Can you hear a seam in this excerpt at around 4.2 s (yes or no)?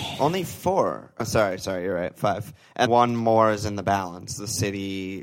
no